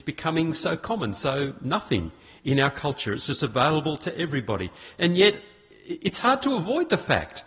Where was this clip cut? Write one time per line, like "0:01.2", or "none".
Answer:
none